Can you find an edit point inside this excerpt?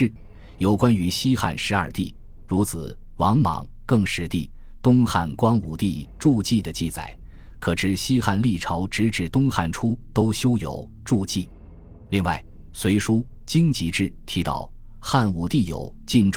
no; 0 cuts

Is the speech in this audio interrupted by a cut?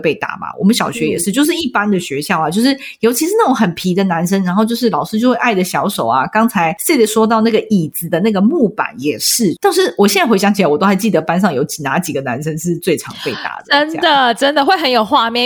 no; 0 cuts

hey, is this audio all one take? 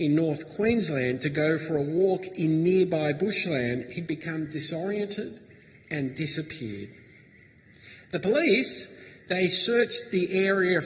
yes; 0 cuts

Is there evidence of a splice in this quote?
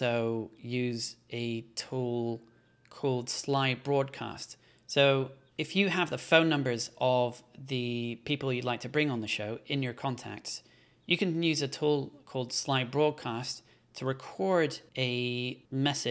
no; 0 cuts

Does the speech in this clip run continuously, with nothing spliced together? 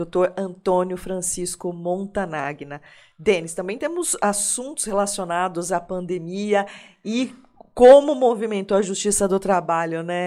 yes; 0 cuts

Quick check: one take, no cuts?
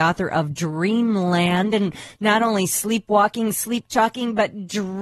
yes; 0 cuts

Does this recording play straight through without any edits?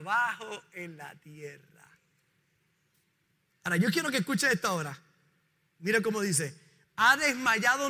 no; 2 cuts; at 3.5 s, 6.8 s

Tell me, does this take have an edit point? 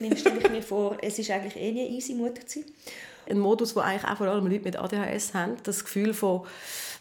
yes; 1 cut; at 3.3 s

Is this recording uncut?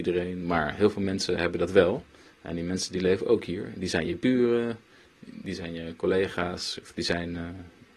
yes; 0 cuts

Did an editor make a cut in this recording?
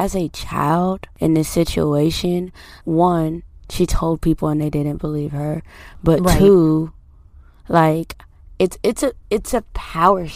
yes; 1 cut; at 2.8 s

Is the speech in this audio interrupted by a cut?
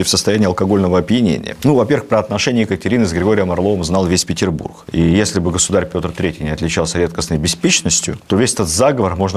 no; 0 cuts

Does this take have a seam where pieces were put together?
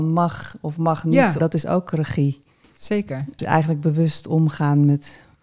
yes; 1 cut; at 1.4 s

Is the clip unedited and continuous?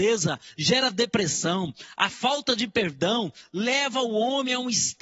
no; 1 cut; at 1.9 s

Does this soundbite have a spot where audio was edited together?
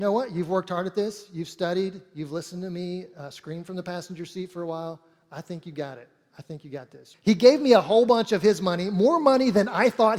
yes; 1 cut; at 7.1 s

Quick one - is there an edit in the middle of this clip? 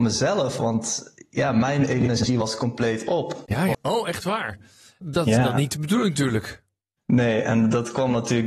yes; 1 cut; at 3.7 s

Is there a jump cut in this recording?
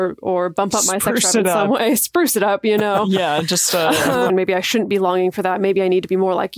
yes; 1 cut; at 4.3 s

